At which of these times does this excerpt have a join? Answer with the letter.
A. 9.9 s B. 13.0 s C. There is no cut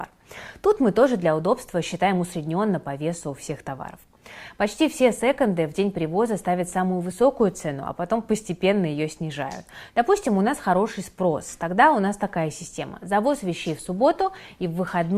A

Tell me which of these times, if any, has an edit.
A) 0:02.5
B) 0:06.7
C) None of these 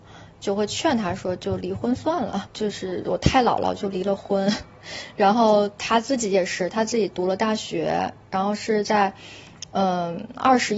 A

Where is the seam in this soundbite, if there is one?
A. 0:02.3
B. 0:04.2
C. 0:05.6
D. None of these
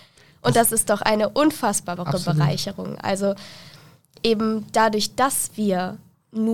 D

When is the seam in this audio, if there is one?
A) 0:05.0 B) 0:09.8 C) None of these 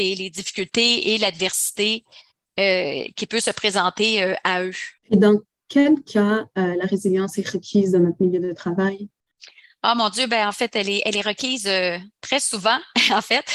A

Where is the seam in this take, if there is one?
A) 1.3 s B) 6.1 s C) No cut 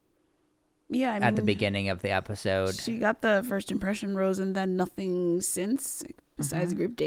C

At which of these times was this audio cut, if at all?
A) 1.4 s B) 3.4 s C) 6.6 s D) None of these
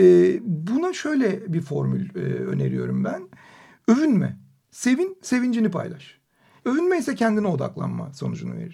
C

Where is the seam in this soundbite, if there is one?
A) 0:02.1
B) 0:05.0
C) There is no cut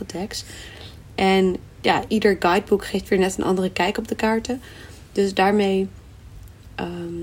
A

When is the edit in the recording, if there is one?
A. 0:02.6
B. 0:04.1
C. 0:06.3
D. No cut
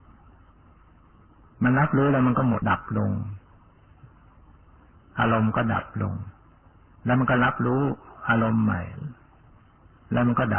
A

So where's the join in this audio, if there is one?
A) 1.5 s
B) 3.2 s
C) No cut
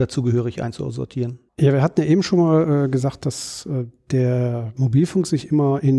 A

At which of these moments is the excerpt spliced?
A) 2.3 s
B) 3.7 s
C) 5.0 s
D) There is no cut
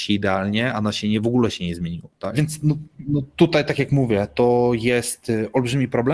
A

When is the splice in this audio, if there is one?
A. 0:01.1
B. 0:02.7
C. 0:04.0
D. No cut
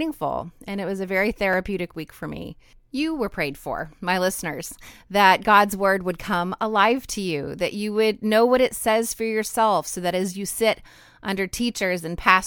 D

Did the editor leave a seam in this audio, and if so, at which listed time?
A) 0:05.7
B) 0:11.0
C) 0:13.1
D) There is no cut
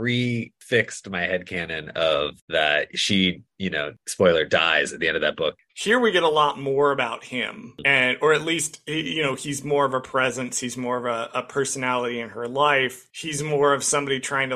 A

